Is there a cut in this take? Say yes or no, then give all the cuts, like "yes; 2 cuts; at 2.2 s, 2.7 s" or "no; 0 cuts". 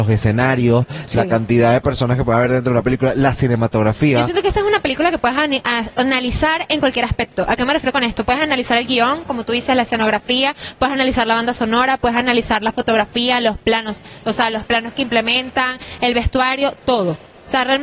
no; 0 cuts